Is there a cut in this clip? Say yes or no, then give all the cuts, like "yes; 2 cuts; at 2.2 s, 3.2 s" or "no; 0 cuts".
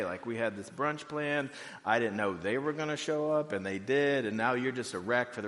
no; 0 cuts